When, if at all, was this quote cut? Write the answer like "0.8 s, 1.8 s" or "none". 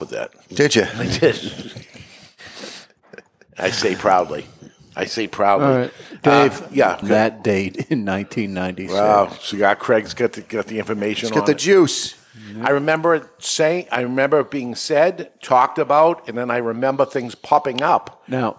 7.0 s